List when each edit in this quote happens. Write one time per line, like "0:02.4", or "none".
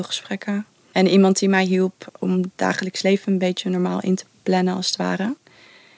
0:02.1